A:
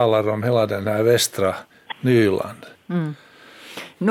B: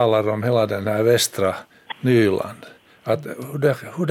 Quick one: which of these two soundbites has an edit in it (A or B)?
A